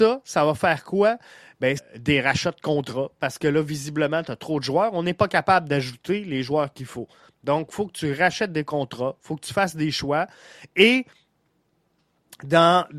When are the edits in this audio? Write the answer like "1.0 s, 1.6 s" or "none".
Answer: 1.8 s